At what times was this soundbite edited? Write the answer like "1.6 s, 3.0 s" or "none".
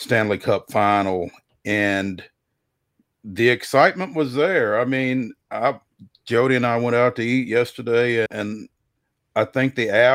8.3 s